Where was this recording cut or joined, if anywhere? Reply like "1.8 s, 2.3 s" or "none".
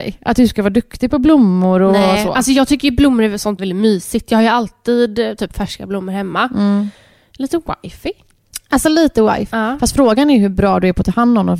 3.6 s, 9.5 s